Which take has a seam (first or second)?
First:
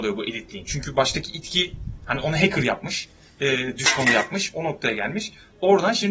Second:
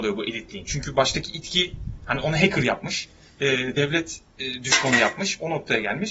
first